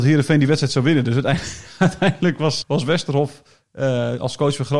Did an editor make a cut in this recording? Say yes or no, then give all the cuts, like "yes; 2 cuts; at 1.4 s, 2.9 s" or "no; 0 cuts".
yes; 1 cut; at 2.6 s